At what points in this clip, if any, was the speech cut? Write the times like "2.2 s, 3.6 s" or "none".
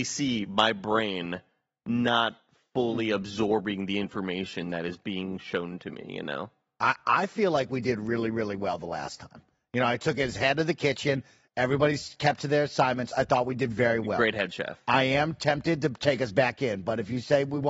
none

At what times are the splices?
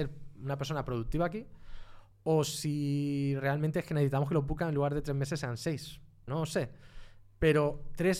6.3 s

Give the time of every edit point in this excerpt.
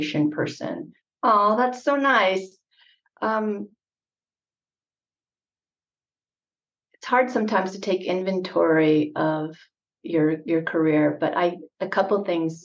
1.0 s

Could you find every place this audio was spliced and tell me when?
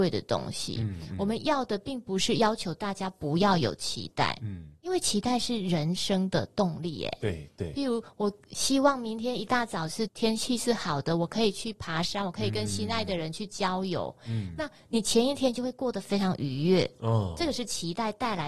10.1 s

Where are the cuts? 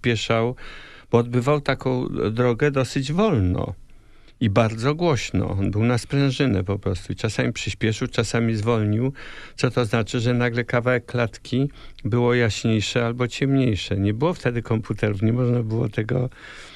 none

